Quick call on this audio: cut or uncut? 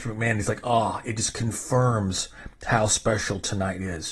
uncut